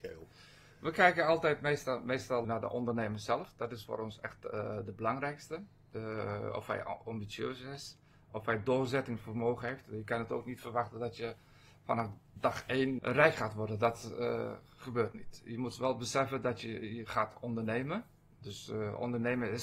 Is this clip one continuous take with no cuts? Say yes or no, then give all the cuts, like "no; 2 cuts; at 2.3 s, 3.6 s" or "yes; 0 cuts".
no; 1 cut; at 2.4 s